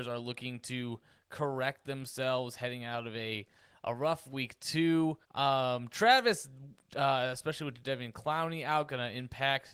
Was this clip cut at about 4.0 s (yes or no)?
no